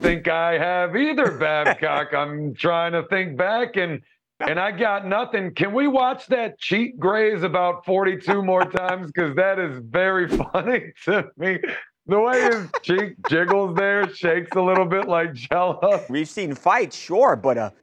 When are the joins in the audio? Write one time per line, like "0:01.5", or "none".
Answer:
0:12.7
0:16.1